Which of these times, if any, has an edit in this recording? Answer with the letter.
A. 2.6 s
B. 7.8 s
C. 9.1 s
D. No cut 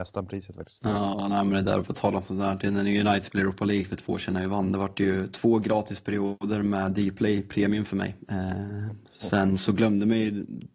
D